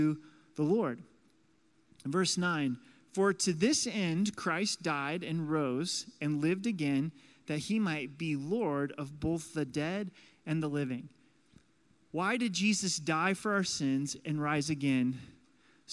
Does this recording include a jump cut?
no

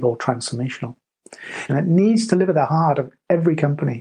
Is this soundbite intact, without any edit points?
no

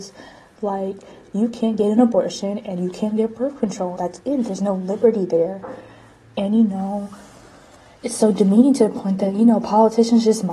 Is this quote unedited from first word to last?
no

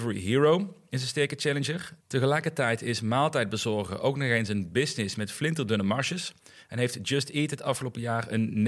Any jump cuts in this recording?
yes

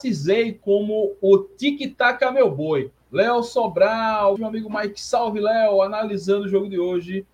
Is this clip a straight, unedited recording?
no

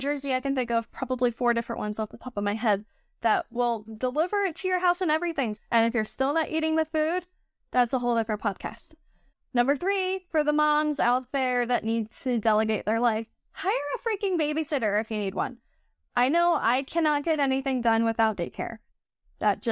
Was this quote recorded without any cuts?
no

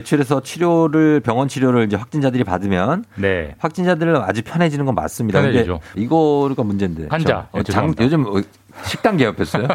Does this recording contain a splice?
yes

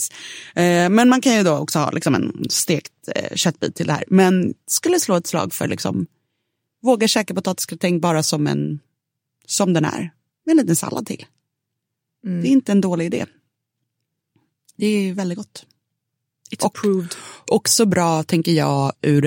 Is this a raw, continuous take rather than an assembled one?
yes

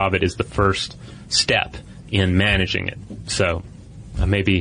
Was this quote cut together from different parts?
no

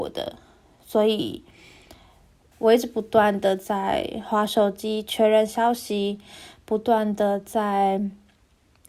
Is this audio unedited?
no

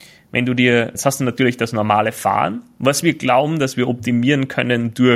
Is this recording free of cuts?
no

